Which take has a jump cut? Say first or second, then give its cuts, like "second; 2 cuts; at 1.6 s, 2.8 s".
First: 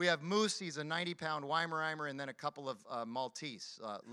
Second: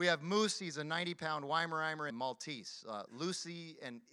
second; 1 cut; at 2.1 s